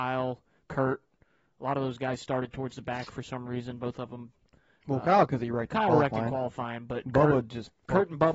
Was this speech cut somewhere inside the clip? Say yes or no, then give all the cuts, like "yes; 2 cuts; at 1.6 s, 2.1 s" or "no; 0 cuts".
no; 0 cuts